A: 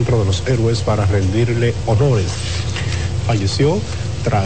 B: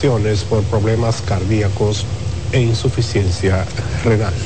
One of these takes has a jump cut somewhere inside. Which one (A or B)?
A